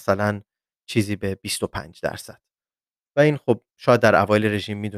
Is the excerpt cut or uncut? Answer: cut